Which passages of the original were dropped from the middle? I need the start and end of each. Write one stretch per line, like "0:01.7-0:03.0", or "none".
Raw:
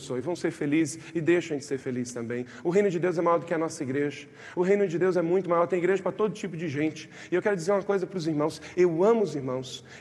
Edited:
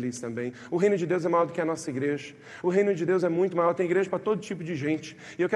none